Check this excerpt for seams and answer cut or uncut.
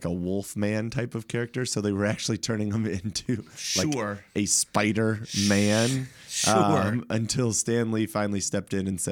uncut